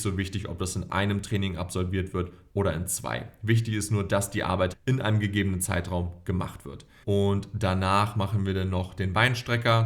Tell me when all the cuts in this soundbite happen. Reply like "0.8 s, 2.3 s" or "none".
4.7 s, 7.0 s